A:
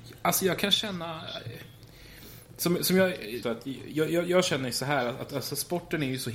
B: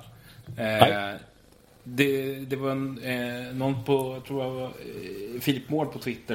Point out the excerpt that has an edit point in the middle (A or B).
A